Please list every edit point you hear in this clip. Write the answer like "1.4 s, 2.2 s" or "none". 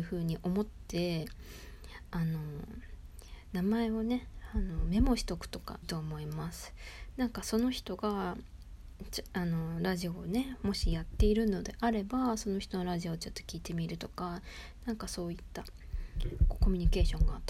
5.8 s